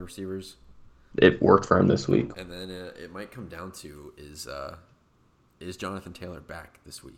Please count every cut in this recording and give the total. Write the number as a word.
two